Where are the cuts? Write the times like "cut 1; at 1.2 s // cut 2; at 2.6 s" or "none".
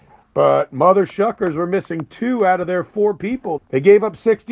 cut 1; at 3.6 s

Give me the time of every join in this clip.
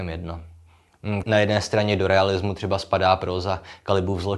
cut 1; at 1.2 s

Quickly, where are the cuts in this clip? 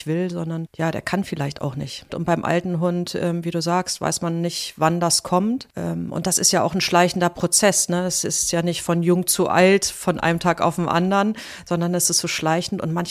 cut 1; at 2.1 s

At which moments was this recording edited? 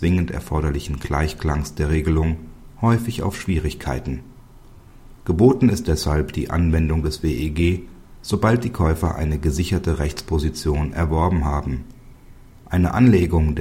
none

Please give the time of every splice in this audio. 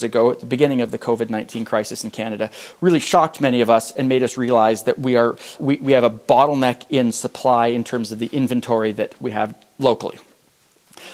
cut 1; at 5.6 s // cut 2; at 9.2 s

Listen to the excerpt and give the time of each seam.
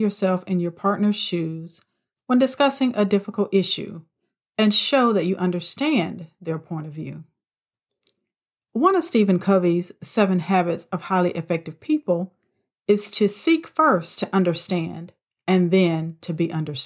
none

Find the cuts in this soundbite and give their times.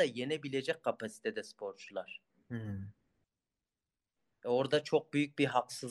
cut 1; at 4.3 s

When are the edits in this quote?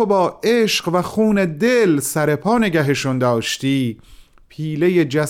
none

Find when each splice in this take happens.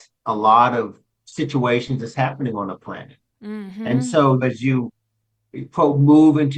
cut 1; at 4.4 s

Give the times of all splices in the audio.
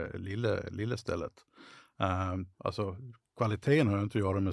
none

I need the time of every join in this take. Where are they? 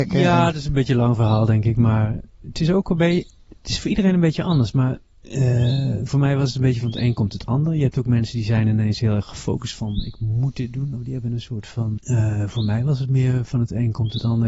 cut 1; at 12.0 s

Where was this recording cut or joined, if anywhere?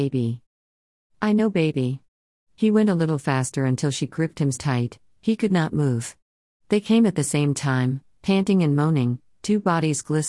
cut 1; at 4.5 s

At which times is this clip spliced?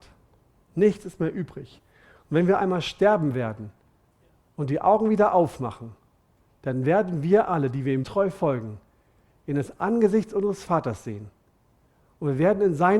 cut 1; at 8.0 s

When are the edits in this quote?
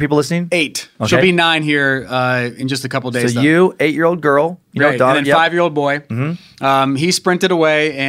none

